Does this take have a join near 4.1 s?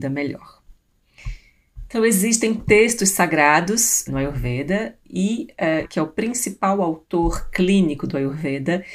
yes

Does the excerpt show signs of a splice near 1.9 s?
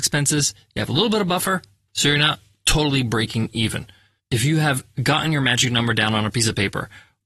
no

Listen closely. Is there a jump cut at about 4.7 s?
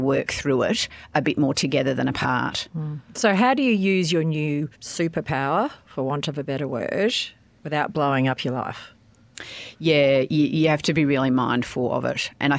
yes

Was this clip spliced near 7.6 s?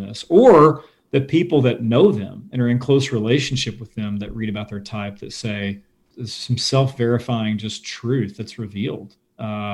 no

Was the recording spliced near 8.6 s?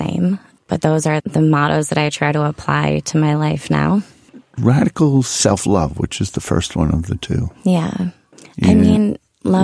no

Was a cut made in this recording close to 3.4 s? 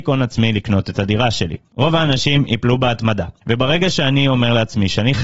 yes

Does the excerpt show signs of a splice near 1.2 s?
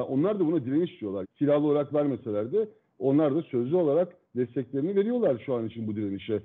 yes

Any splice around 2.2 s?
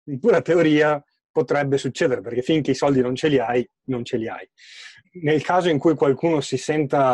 no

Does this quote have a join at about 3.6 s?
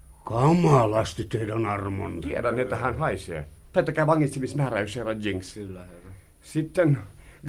yes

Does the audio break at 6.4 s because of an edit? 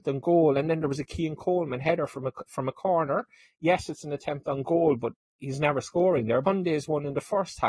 yes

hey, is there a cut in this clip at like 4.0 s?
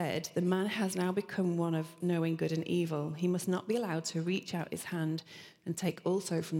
no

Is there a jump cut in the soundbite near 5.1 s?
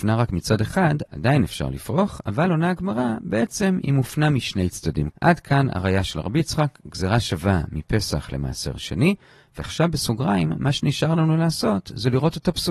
yes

